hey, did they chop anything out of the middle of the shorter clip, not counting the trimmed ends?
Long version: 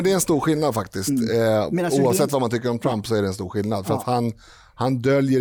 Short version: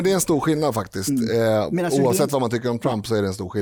no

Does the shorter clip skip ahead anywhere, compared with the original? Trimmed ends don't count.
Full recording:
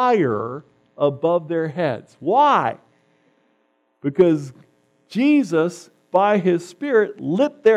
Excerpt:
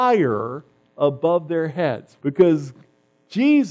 yes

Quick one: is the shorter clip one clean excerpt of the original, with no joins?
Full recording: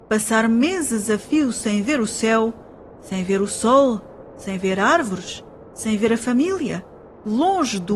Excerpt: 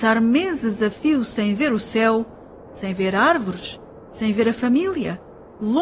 no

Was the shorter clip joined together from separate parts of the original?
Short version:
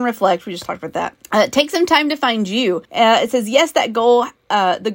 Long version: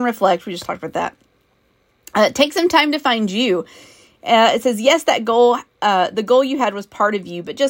yes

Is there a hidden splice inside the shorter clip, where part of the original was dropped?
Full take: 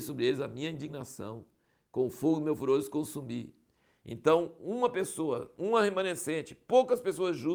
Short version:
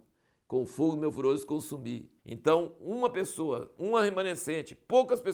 yes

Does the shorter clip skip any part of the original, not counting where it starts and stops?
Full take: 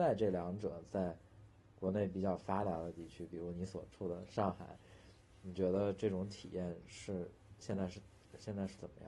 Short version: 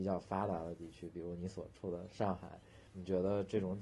yes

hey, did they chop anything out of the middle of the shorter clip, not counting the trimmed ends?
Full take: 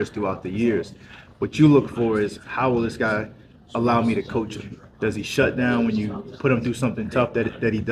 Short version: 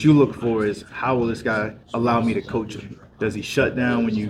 yes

